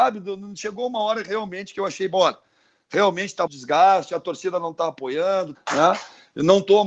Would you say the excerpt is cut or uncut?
cut